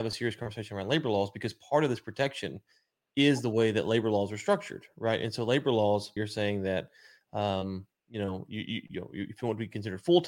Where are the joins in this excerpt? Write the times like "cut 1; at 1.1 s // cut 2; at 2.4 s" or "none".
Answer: cut 1; at 6.2 s